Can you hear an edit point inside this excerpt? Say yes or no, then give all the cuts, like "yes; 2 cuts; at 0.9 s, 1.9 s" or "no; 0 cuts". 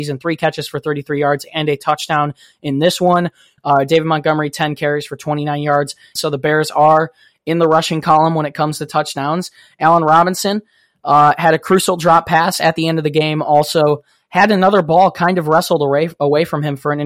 yes; 2 cuts; at 3.6 s, 6.2 s